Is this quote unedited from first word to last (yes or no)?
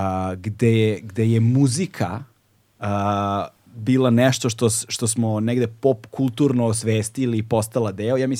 yes